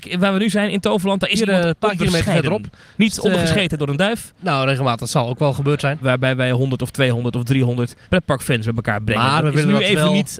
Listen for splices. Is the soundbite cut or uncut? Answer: cut